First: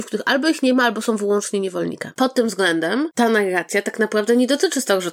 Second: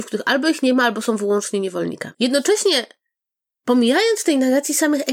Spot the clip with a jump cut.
first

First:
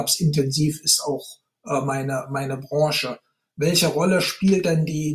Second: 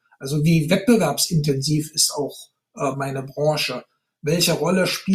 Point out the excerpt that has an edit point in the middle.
second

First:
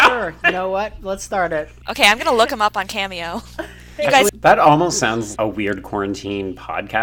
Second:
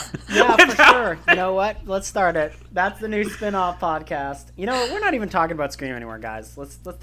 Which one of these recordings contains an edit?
first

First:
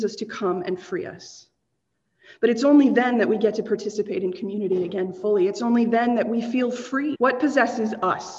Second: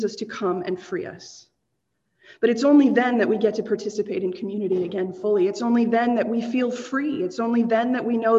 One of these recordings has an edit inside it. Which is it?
first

